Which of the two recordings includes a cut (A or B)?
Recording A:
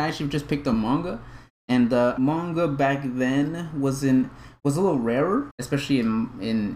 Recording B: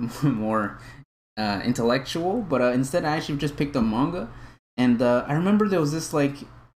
A